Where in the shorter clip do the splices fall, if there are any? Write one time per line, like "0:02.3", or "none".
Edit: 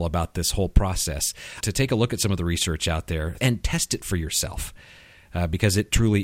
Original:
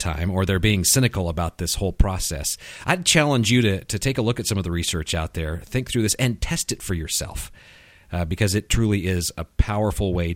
0:01.6
0:03.4